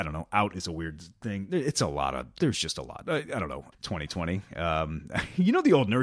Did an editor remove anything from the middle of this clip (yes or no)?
yes